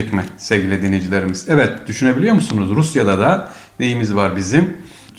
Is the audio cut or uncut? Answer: uncut